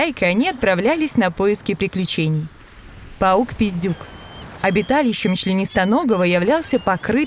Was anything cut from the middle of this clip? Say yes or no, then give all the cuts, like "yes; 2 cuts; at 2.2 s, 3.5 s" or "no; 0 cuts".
no; 0 cuts